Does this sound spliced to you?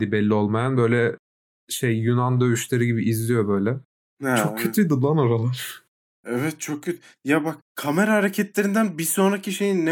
no; 0 cuts

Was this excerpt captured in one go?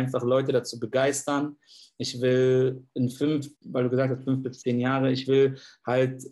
no; 1 cut; at 3.6 s

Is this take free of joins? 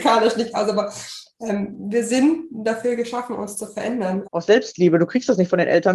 no; 1 cut; at 4.2 s

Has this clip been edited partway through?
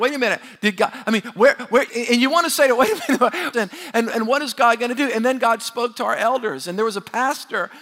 yes; 2 cuts; at 1.9 s, 3.5 s

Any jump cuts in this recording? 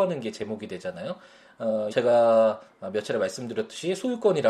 yes; 1 cut; at 1.9 s

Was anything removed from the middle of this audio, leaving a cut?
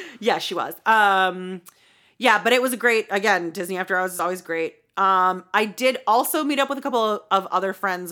no; 0 cuts

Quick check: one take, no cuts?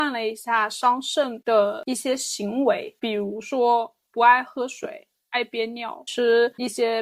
yes; 0 cuts

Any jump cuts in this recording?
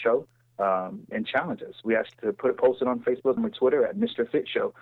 yes; 3 cuts; at 1.1 s, 2.1 s, 3.4 s

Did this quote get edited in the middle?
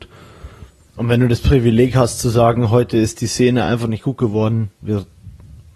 no; 0 cuts

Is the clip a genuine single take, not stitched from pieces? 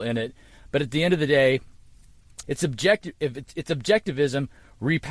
no; 1 cut; at 2.4 s

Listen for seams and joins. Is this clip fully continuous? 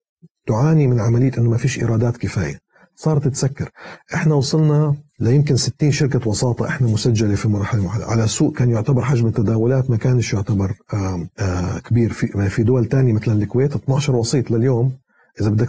no; 2 cuts; at 5.1 s, 11.3 s

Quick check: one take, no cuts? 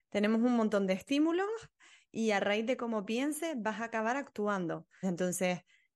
no; 1 cut; at 5.0 s

